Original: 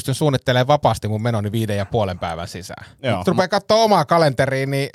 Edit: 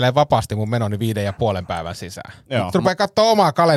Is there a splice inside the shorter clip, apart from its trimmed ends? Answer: no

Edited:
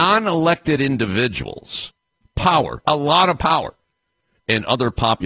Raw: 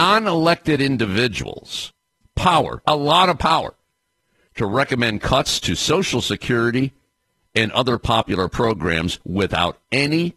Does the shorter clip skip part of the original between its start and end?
yes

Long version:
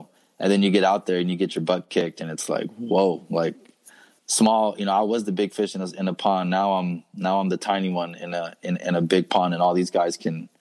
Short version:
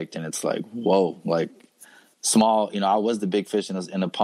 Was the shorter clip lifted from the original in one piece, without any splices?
yes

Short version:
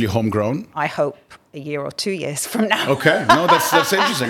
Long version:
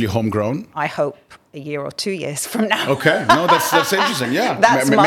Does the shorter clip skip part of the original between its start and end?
no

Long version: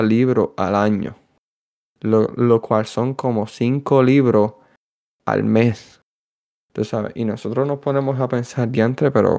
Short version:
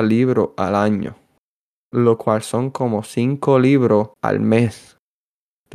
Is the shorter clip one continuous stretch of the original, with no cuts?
no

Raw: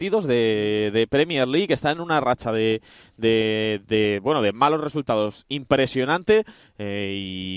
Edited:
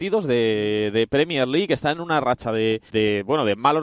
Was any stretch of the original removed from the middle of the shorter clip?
yes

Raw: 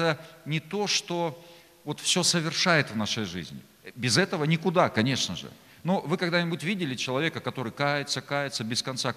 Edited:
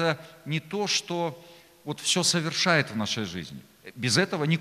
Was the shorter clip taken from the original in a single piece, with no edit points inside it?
yes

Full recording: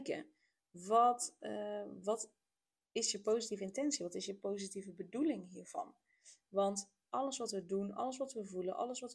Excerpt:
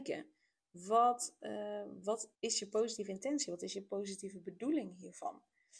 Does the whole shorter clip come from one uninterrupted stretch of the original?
no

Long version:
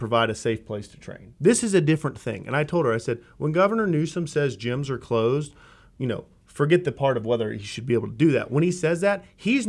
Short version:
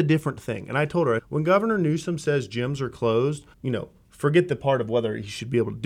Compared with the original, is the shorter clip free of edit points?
no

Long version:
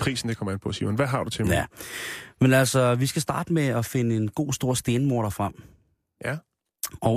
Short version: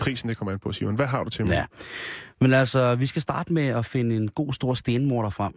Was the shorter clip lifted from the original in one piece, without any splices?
yes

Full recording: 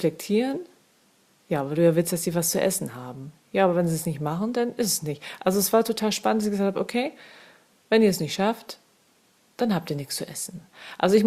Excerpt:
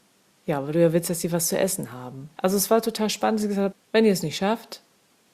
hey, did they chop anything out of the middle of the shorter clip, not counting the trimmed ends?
yes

